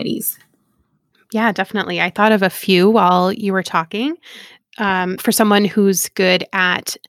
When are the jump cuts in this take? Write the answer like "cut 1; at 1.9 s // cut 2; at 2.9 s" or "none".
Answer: cut 1; at 5.2 s